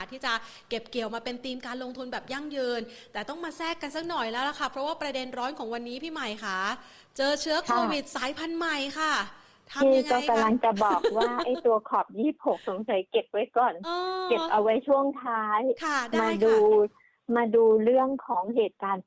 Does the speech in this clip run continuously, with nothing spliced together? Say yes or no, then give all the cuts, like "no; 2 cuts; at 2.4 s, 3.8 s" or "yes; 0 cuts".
yes; 0 cuts